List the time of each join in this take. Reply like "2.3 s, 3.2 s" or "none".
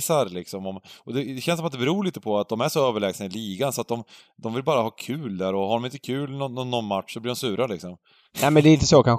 none